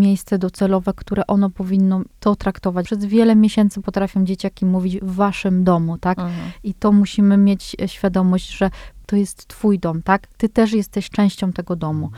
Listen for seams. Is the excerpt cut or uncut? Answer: cut